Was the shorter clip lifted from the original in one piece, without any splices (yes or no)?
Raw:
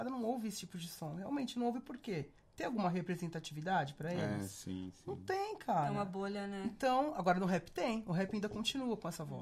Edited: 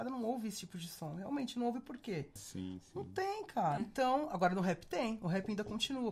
no